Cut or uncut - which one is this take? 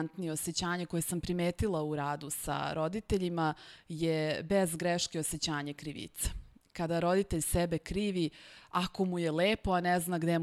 uncut